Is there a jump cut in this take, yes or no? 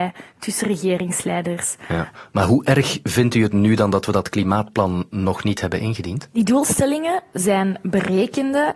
no